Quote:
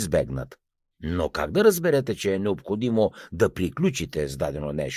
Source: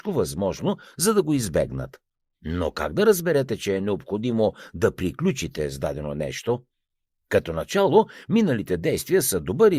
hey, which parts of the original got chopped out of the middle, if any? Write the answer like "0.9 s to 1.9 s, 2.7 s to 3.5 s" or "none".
none